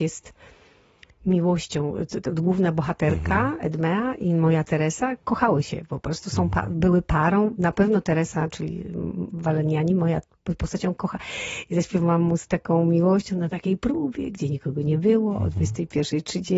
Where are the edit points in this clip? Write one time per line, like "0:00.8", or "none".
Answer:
none